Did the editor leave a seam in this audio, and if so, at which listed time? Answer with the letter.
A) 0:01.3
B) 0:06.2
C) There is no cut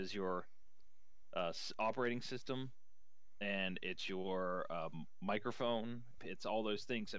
B